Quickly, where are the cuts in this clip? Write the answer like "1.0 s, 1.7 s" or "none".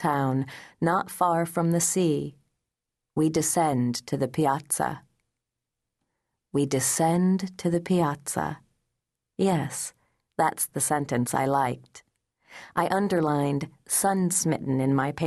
none